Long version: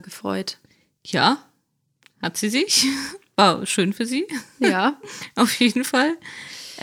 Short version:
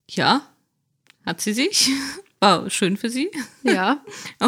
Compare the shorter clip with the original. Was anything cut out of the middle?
no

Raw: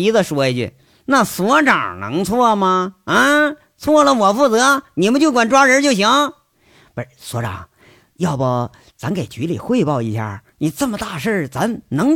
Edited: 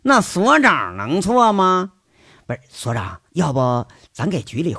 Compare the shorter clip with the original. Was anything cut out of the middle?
yes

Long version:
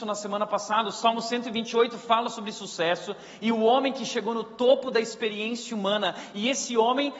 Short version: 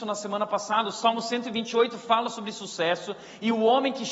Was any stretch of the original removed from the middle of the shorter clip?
no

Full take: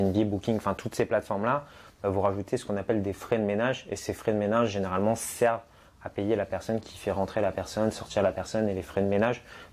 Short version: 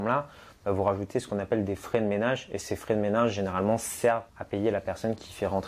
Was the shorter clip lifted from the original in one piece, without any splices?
no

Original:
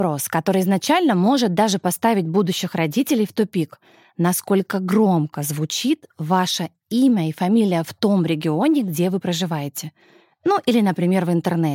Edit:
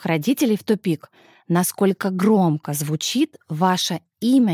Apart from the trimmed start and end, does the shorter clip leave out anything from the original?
no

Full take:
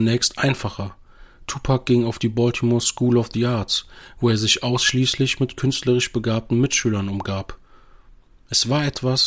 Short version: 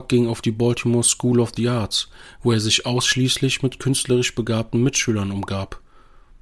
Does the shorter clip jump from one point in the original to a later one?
no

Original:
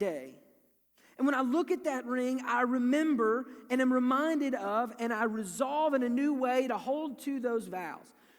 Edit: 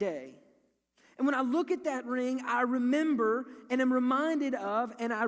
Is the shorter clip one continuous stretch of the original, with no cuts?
yes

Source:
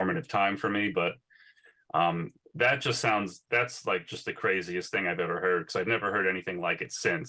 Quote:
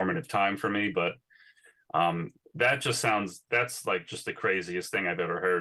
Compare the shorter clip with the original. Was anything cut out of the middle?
no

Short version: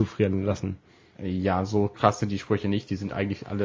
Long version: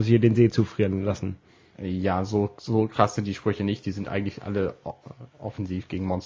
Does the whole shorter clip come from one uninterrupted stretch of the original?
no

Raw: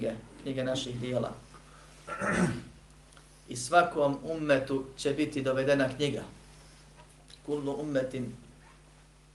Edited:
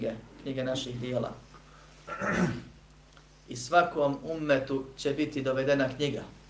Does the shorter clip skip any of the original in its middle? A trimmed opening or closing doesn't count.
no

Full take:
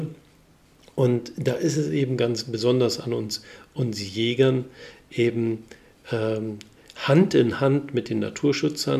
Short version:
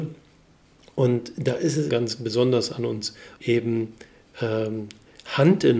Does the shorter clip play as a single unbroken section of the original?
no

